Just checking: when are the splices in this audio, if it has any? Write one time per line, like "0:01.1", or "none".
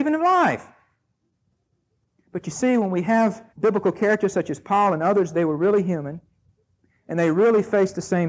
0:03.5